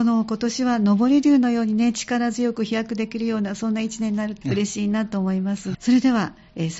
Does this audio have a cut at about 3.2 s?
no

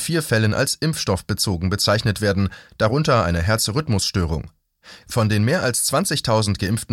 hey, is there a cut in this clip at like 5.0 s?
yes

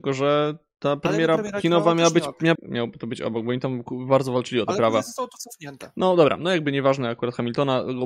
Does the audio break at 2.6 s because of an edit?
yes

